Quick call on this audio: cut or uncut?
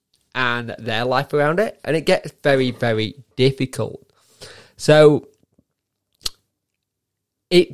uncut